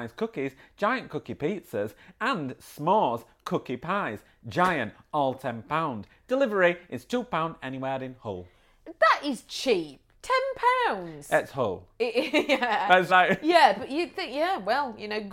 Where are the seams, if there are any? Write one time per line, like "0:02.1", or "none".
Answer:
0:13.1